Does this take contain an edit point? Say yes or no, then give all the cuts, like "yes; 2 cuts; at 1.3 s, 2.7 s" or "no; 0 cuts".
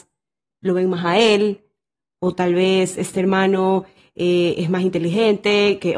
no; 0 cuts